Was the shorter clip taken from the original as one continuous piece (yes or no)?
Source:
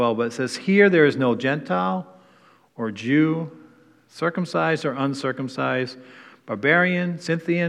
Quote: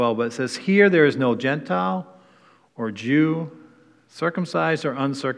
yes